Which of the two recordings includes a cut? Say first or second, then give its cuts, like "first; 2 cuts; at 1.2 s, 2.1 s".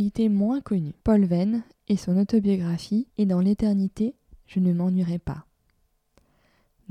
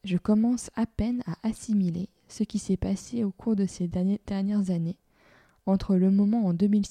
first; 2 cuts; at 1.0 s, 3.1 s